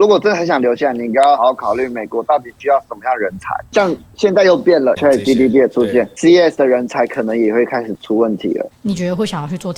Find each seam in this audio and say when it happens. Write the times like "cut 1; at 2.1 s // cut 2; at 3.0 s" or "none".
cut 1; at 1.4 s // cut 2; at 4.9 s // cut 3; at 8.7 s